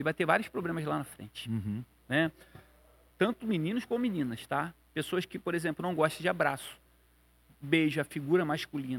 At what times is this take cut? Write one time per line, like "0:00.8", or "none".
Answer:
0:03.1